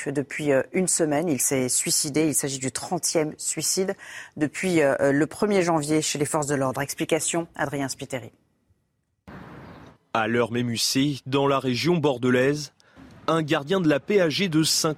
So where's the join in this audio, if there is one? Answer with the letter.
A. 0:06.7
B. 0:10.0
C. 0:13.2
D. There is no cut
B